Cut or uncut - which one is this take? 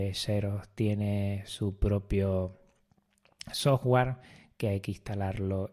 uncut